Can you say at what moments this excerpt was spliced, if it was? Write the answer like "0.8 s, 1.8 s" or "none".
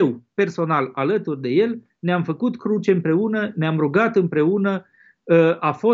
none